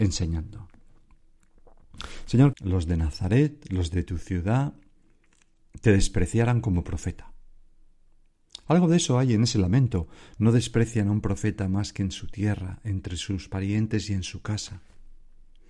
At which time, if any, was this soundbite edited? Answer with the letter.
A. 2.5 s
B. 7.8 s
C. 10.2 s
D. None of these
A